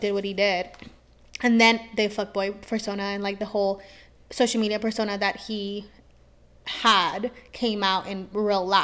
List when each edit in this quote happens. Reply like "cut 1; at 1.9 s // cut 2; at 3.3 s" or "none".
none